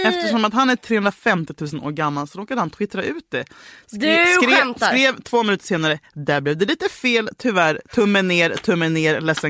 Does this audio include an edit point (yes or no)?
no